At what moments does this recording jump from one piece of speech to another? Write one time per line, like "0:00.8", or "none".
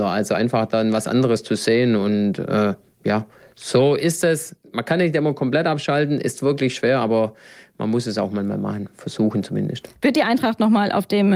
0:10.0